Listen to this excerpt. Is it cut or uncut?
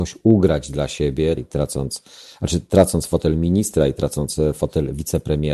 cut